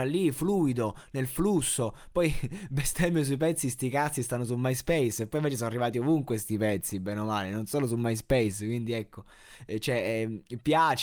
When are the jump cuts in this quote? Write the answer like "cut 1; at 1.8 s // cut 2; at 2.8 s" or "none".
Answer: none